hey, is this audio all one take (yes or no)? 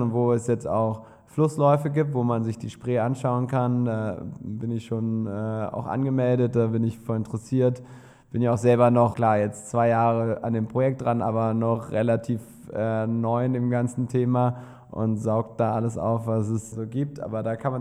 no